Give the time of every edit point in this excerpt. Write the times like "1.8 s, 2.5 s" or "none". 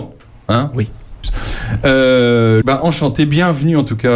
1.2 s, 2.6 s